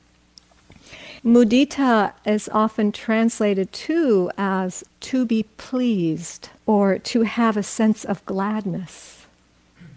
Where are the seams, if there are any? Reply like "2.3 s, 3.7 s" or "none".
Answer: 1.2 s, 4.9 s, 6.6 s